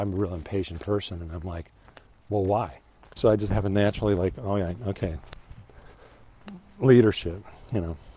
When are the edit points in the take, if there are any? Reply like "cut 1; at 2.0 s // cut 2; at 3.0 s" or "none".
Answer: cut 1; at 3.2 s